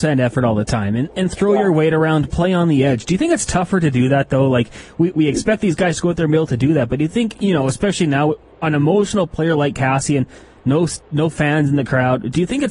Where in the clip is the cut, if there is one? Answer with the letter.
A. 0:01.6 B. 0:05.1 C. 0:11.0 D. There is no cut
B